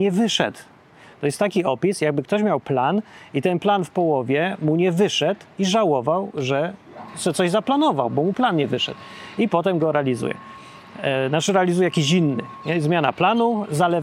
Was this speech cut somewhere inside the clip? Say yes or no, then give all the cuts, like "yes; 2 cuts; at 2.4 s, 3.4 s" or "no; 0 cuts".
no; 0 cuts